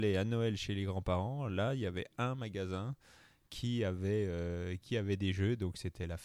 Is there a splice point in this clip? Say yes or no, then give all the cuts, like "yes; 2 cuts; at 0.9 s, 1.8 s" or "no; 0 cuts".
no; 0 cuts